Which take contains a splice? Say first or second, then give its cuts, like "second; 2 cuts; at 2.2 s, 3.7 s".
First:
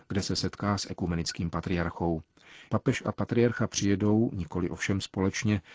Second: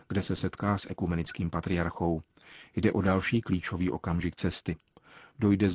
first; 1 cut; at 2.7 s